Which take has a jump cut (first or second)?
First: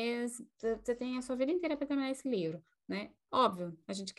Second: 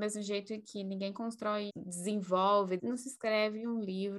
second